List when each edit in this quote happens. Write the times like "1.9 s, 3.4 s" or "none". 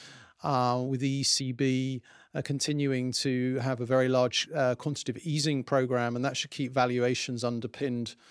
none